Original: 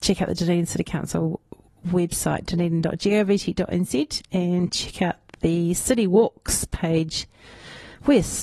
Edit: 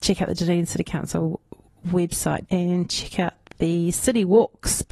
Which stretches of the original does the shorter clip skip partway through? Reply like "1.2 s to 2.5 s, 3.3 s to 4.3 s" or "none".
2.5 s to 4.3 s